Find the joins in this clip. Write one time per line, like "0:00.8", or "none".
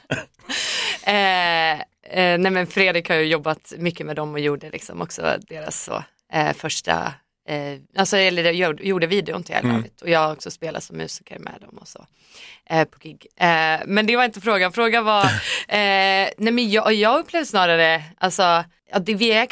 none